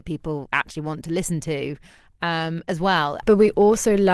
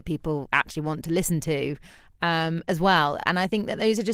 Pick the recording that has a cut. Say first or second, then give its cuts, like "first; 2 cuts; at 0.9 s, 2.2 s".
first; 1 cut; at 3.2 s